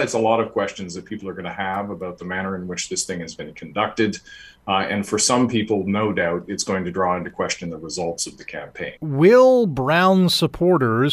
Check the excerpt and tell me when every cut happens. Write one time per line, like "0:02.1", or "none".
0:09.0